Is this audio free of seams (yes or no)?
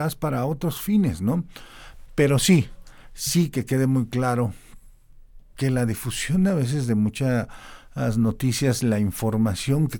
no